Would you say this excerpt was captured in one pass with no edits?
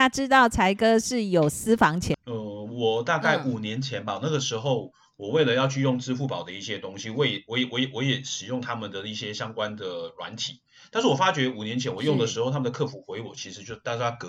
no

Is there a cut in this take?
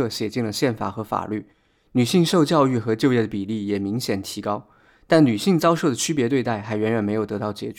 no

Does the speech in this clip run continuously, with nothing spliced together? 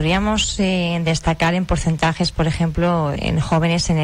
no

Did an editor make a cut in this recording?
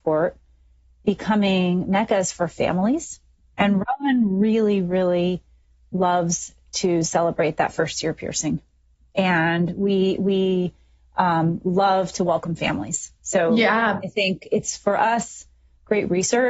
no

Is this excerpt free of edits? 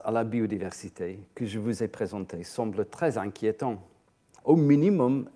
no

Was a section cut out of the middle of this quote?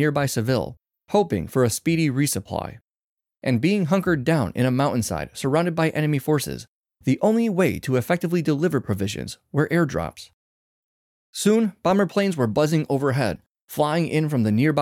no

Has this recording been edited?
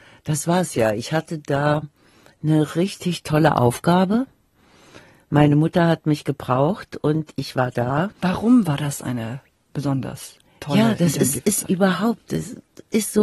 yes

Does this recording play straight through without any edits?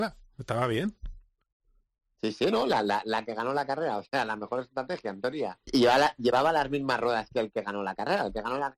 no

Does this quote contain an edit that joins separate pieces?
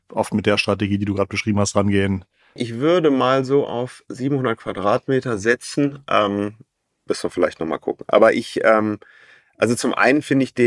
yes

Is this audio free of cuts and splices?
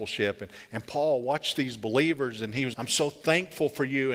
no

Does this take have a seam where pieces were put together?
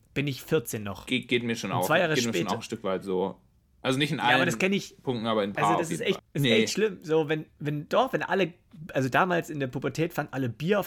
yes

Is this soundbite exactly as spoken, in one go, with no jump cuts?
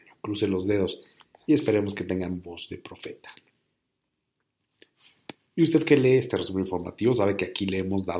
yes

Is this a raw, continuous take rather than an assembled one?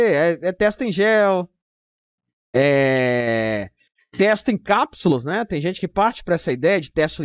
yes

